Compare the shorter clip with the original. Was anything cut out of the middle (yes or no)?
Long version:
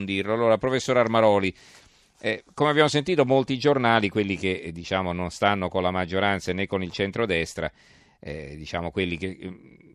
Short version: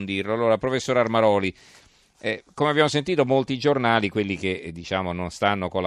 no